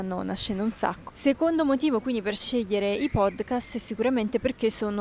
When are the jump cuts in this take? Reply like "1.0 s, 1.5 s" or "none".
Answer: 1.1 s